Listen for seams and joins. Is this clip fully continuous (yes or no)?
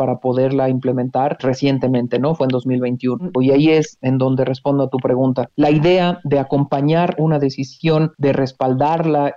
no